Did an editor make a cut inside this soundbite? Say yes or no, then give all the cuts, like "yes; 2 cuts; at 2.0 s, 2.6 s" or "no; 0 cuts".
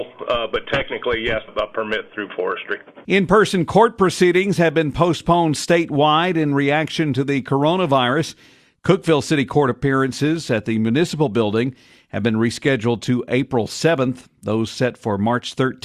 yes; 2 cuts; at 1.5 s, 3.0 s